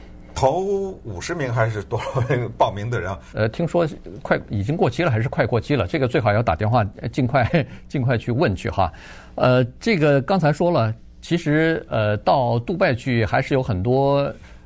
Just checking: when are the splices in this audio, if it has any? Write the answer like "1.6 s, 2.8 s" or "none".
3.3 s